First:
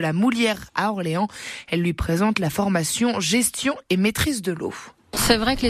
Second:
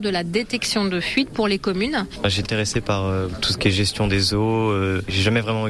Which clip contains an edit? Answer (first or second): second